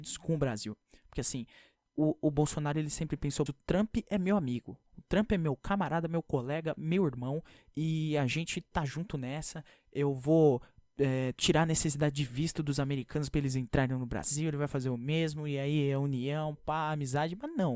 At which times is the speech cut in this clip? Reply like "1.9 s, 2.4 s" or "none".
3.5 s